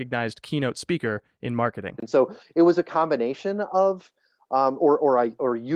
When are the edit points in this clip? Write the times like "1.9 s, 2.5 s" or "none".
none